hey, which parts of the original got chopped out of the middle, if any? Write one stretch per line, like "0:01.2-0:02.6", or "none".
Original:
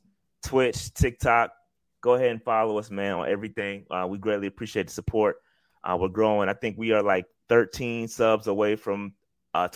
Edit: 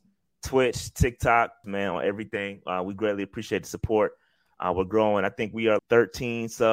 0:01.6-0:02.9
0:07.0-0:07.4